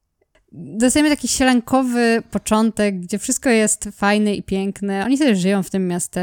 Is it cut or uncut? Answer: uncut